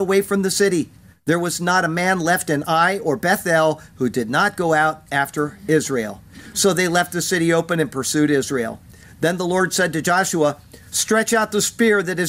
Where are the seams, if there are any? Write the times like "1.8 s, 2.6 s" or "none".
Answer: none